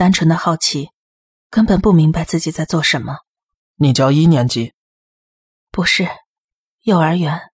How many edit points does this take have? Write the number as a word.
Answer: one